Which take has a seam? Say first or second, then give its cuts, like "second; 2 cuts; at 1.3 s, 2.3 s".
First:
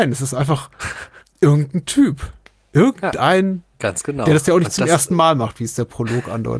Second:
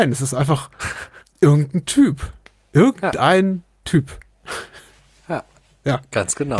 first; 1 cut; at 3.7 s